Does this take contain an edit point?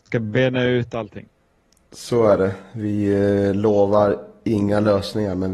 no; 0 cuts

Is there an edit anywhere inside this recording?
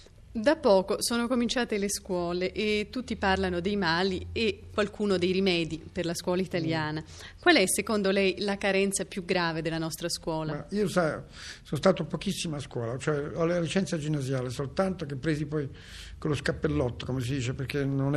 no; 0 cuts

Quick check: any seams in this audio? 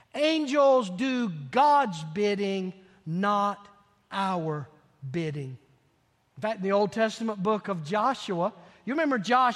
no; 0 cuts

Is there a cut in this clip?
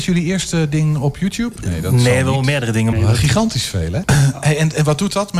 yes; 2 cuts; at 2.9 s, 4.0 s

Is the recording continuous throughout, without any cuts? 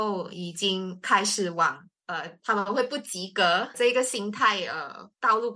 no; 1 cut; at 3.7 s

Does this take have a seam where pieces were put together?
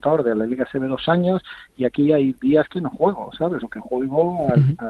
no; 0 cuts

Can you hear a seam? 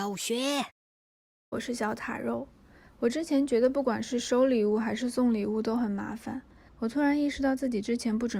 yes; 2 cuts; at 1.5 s, 6.7 s

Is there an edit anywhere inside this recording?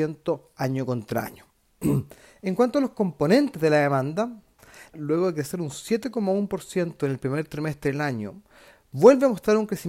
yes; 1 cut; at 4.9 s

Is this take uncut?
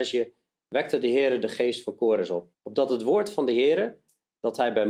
no; 1 cut; at 2.5 s

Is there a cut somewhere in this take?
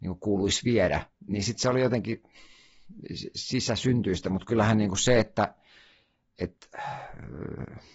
no; 0 cuts

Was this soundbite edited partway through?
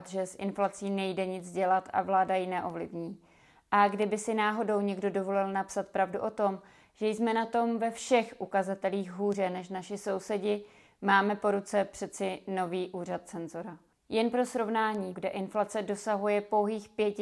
yes; 2 cuts; at 14.0 s, 15.1 s

